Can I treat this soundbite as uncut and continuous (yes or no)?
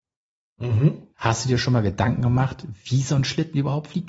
no